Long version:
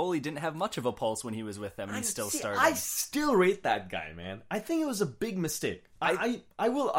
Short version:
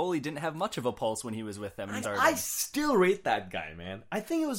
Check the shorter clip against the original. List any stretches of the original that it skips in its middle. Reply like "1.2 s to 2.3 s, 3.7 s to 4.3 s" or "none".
2.0 s to 2.4 s

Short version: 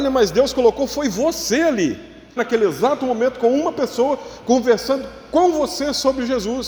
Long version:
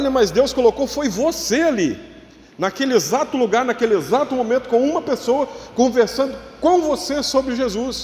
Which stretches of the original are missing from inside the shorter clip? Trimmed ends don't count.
2.4 s to 3.7 s

